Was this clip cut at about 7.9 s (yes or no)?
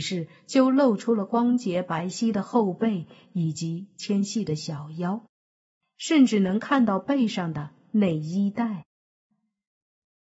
no